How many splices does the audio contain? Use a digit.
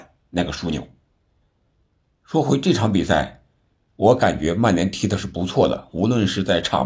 0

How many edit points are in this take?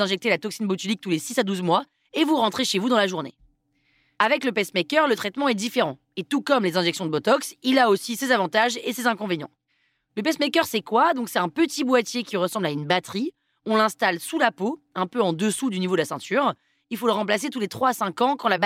0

